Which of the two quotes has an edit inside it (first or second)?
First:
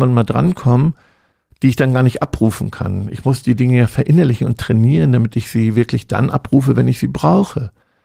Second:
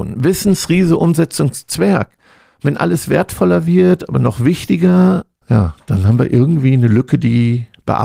second